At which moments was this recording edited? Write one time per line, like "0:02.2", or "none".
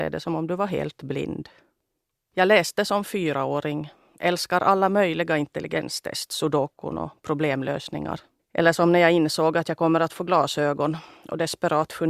0:02.3
0:08.4

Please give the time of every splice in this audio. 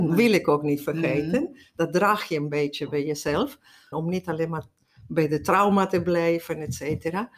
0:03.9

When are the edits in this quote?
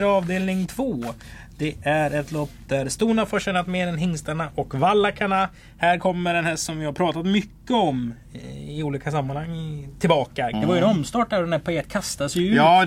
0:10.5

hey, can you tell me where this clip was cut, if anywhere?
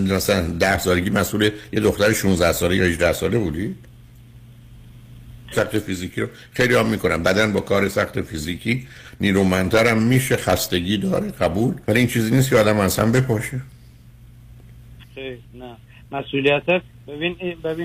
0:05.5
0:11.8
0:15.0

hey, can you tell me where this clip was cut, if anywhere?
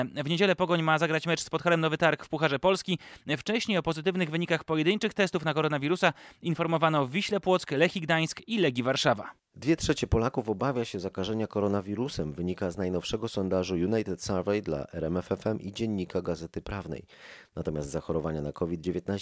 none

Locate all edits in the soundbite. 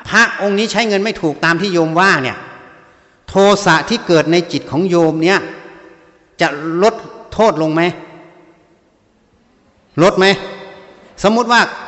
none

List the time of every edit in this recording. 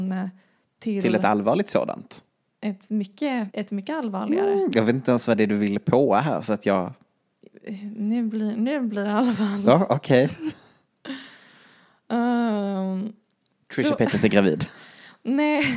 0:03.5

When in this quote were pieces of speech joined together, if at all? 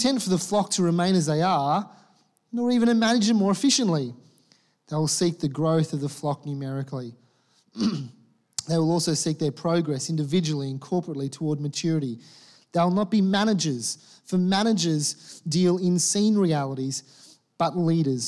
none

